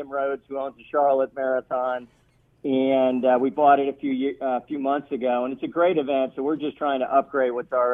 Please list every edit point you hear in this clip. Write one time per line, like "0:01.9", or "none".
none